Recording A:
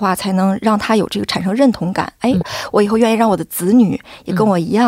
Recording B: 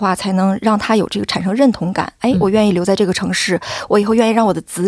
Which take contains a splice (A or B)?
A